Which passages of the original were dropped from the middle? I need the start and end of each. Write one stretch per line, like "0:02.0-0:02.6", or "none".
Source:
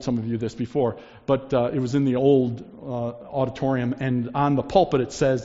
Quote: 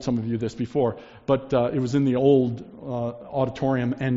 none